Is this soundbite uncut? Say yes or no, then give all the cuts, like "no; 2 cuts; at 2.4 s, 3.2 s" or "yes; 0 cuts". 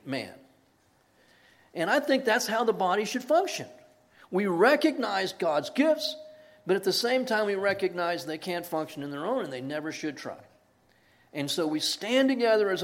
yes; 0 cuts